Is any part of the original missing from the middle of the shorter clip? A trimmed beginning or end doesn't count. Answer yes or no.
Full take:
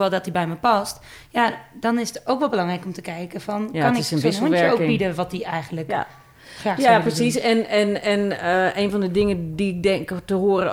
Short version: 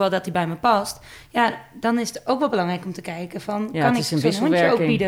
no